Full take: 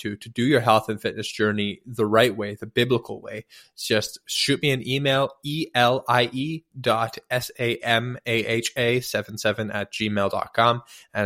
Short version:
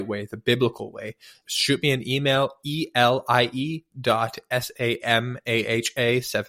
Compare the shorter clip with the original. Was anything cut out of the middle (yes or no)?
yes